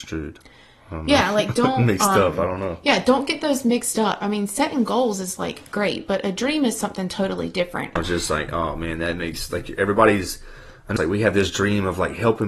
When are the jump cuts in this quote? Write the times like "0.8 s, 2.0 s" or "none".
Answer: 8.0 s, 11.0 s

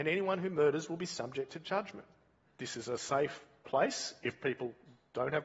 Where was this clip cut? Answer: 2.5 s

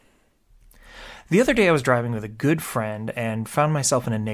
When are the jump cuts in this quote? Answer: none

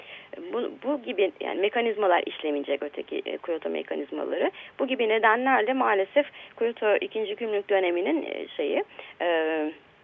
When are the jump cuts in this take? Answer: none

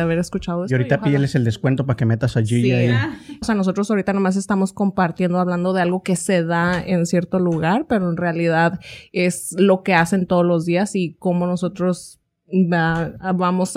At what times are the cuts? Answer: 3.4 s

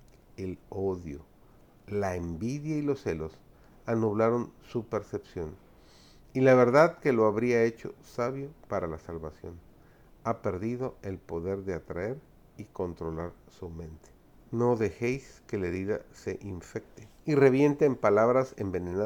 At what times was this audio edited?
14.4 s, 17.2 s

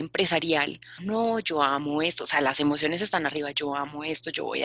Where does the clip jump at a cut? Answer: 1.0 s

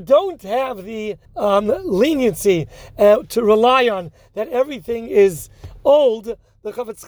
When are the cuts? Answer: 1.2 s

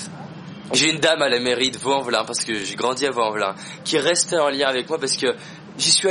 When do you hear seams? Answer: none

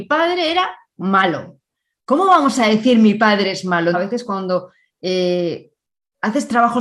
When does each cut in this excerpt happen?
3.9 s

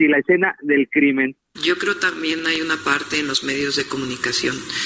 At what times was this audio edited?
1.5 s

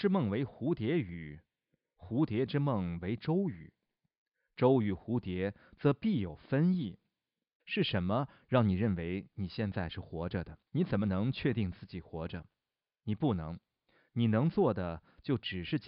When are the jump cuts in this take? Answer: 7.6 s, 10.7 s

